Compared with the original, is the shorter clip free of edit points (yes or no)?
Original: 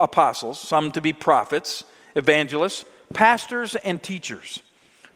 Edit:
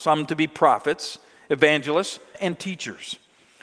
no